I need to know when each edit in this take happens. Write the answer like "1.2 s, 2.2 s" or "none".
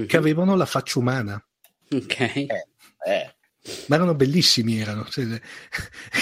none